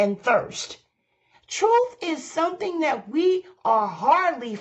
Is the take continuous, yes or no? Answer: no